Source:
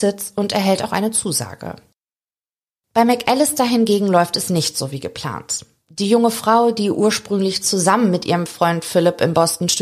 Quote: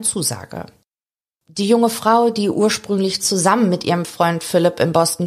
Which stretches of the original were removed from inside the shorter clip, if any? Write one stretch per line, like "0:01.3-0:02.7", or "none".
0:02.5-0:05.8